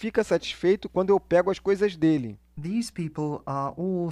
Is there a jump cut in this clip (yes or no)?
no